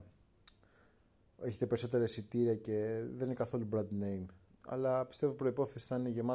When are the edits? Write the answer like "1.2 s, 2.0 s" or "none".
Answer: 4.5 s